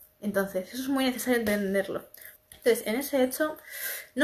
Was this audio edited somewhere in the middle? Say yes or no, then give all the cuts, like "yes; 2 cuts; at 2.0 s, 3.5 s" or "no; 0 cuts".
yes; 1 cut; at 2.4 s